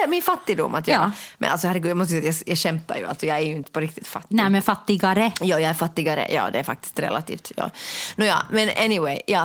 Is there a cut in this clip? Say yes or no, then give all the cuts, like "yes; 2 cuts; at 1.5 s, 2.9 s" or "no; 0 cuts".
no; 0 cuts